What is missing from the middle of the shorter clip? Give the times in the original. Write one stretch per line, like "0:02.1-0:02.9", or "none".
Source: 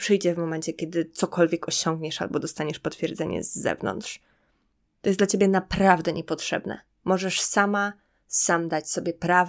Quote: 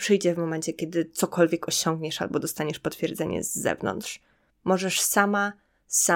0:04.5-0:06.9